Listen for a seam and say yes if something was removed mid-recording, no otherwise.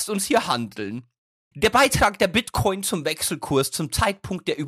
yes